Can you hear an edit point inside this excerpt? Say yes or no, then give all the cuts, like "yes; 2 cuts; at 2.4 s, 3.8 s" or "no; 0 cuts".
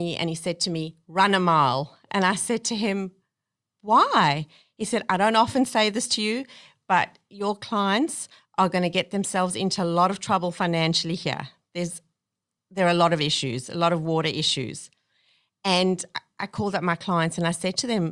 no; 0 cuts